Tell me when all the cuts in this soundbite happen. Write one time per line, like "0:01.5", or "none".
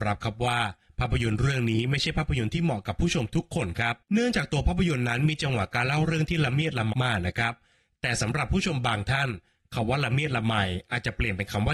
0:04.0
0:06.9

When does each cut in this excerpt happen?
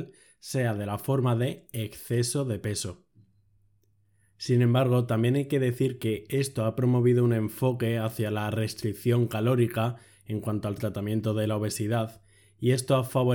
none

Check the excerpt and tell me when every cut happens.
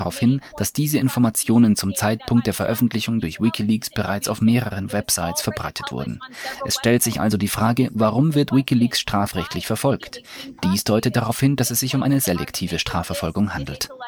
none

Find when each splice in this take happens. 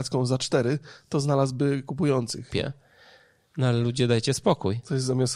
0:02.5

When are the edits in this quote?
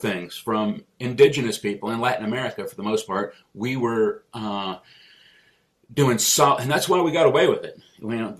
0:03.4

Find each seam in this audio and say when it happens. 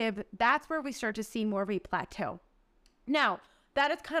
none

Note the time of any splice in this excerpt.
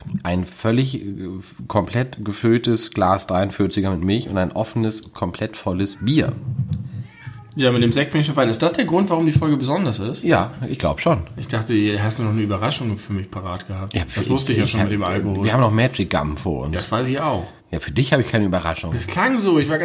0:17.6

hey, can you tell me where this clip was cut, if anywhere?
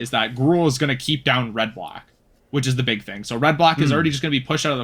none

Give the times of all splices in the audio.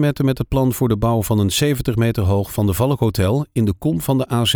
none

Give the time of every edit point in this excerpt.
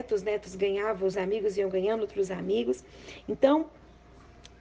0:01.1

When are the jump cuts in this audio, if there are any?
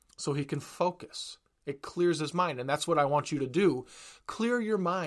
none

